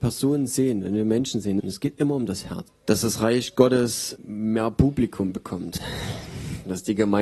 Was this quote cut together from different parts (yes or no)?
yes